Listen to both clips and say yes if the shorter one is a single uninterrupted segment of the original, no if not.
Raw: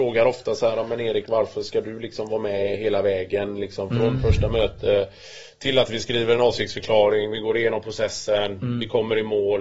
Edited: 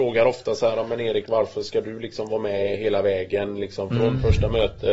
yes